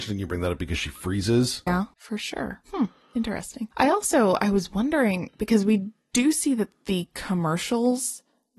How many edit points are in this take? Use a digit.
2